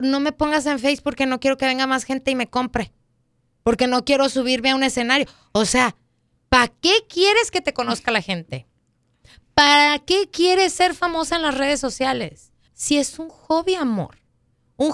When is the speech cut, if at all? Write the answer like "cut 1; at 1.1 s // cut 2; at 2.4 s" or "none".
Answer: cut 1; at 12.7 s